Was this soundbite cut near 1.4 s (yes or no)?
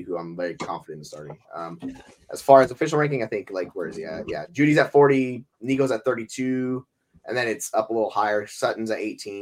no